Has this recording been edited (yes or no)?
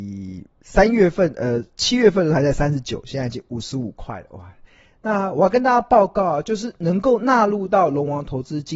no